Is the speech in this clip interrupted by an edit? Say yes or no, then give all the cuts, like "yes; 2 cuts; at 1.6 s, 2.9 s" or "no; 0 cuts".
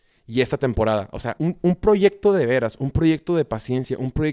yes; 1 cut; at 1.4 s